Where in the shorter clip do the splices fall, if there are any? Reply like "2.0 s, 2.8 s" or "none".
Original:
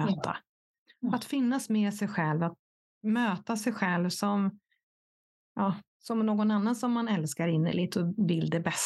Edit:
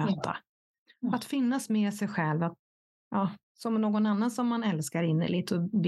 3.0 s